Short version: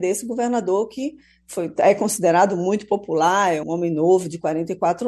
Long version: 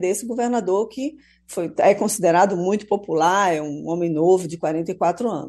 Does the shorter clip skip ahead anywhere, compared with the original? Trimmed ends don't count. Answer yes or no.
yes